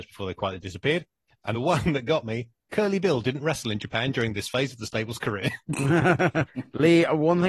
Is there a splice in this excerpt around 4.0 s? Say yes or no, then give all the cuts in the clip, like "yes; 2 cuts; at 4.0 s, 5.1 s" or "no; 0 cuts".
no; 2 cuts; at 1.5 s, 6.5 s